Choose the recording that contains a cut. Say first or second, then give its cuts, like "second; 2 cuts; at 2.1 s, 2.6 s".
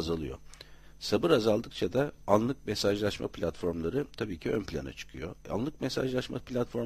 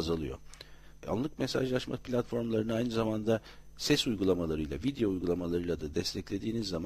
second; 1 cut; at 1.0 s